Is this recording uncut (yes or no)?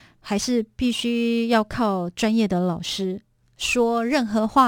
no